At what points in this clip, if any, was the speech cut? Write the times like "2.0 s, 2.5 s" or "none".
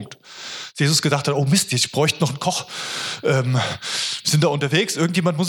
none